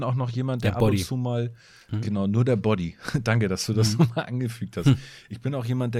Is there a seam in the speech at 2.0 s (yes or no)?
no